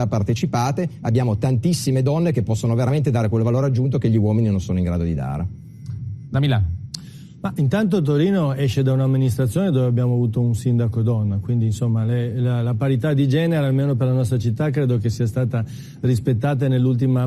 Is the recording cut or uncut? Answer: uncut